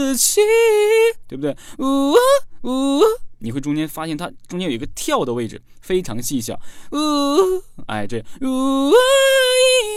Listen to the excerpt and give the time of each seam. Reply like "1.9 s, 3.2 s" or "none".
none

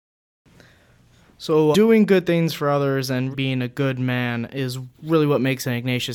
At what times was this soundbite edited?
1.7 s, 3.3 s

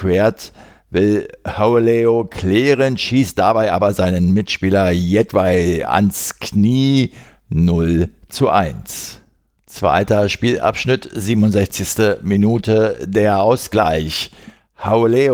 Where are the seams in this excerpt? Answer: none

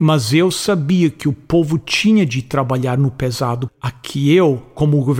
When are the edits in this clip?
3.7 s

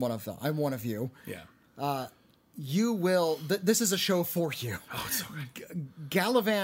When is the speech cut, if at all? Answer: none

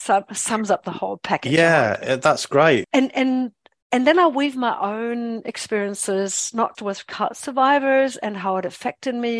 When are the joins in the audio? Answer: 2.8 s, 6.7 s

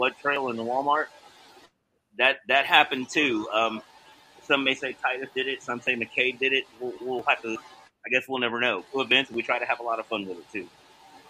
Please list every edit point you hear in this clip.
8.9 s

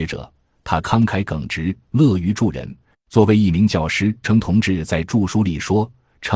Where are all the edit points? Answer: 2.9 s, 4.2 s

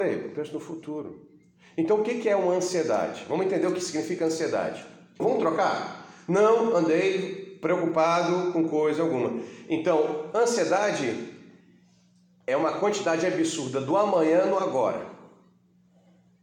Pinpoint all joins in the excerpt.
5.2 s

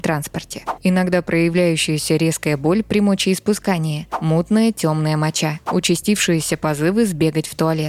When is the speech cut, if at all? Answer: none

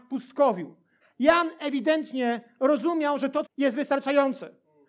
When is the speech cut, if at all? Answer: 1.0 s, 3.5 s

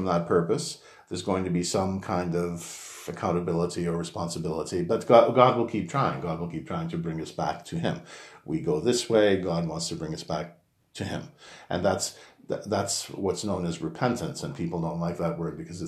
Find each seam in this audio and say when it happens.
none

